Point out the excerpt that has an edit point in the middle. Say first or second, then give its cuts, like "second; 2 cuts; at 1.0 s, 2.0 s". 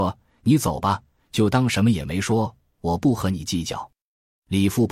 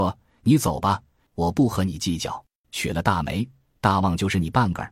second; 2 cuts; at 1.3 s, 2.6 s